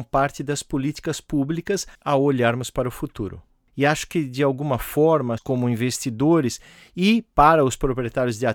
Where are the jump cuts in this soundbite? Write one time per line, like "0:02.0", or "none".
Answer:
0:05.4